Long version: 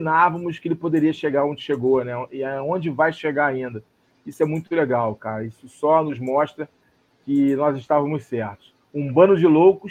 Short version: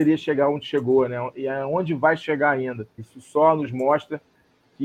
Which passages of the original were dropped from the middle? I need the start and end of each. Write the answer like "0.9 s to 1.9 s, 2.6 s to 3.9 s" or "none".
3.9 s to 5.5 s